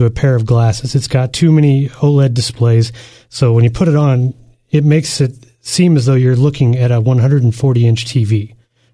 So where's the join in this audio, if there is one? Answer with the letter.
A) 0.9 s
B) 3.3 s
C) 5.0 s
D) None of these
D